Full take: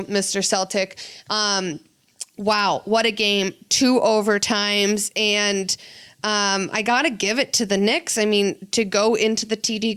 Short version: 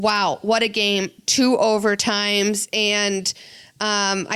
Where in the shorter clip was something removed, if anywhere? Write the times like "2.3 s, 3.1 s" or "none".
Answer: none